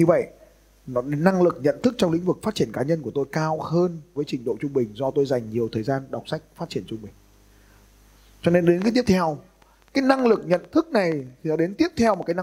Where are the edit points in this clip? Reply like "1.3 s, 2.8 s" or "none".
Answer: 4.2 s